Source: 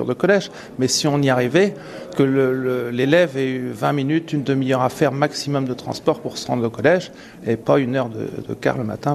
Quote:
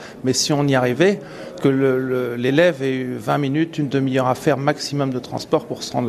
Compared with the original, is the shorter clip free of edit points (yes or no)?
yes